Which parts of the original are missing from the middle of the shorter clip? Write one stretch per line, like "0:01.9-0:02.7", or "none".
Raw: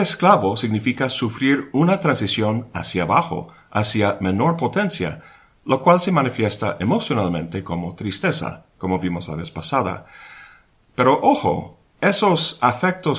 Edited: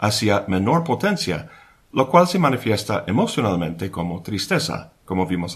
none

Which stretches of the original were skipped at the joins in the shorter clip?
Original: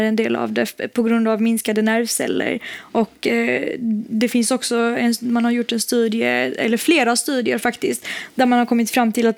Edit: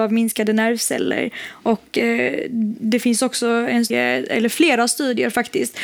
0:05.2-0:06.2

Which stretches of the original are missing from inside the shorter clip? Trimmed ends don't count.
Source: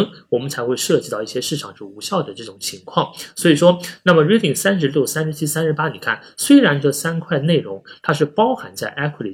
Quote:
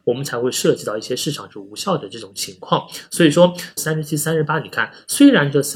0:04.0-0:05.1

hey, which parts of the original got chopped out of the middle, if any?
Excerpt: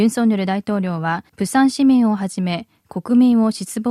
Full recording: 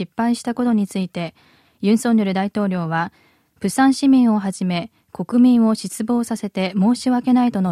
0:03.2-0:03.5

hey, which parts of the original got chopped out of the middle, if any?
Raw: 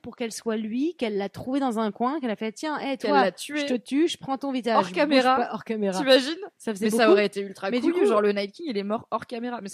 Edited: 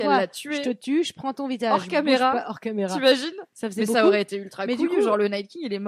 none

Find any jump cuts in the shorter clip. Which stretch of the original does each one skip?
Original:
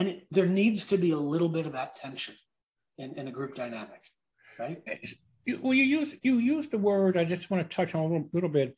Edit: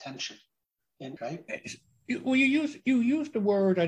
0:03.1-0:04.5

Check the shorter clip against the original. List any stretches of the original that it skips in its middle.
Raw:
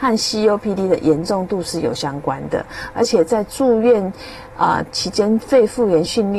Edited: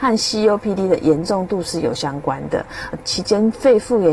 0:02.9-0:04.8

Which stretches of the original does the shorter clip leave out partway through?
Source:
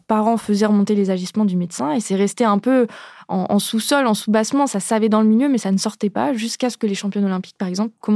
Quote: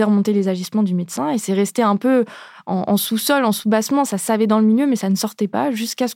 none

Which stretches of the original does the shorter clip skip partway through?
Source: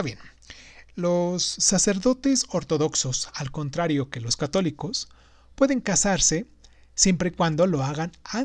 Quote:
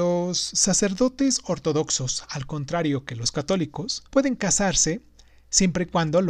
0:05.1-0:05.5

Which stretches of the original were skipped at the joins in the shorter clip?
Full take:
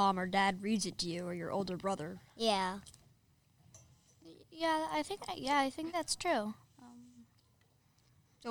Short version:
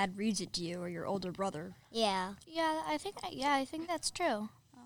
0:02.9-0:04.5

